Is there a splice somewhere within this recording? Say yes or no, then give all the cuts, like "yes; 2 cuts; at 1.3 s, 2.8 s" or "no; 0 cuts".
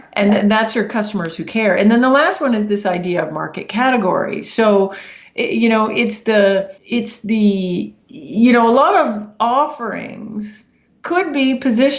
yes; 2 cuts; at 6.8 s, 8.0 s